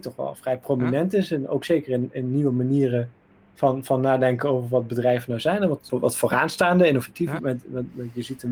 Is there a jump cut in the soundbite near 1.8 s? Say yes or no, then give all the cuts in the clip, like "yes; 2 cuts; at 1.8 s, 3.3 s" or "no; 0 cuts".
no; 2 cuts; at 5.9 s, 7.4 s